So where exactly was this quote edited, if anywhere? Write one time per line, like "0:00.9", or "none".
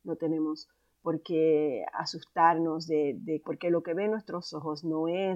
0:03.4